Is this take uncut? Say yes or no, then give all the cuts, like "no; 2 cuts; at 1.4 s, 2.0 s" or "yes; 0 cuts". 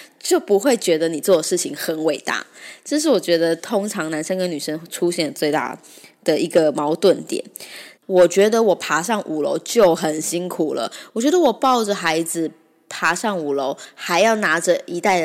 no; 2 cuts; at 8.0 s, 11.1 s